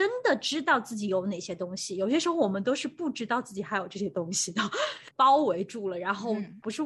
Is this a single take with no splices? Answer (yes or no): no